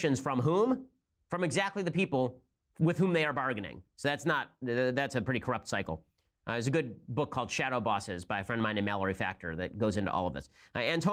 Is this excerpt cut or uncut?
uncut